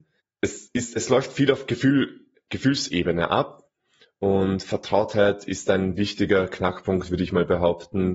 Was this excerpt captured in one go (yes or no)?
yes